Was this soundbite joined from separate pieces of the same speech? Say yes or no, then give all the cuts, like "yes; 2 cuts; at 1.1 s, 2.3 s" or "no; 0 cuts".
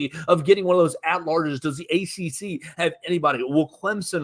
no; 0 cuts